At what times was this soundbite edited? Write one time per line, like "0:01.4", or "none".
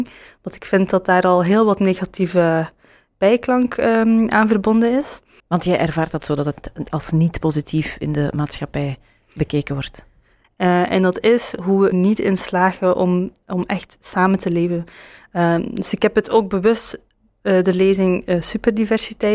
0:05.4
0:10.4
0:11.9